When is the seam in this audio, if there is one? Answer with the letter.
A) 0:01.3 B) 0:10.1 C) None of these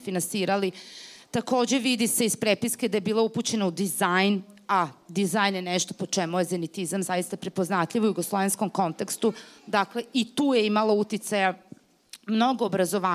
C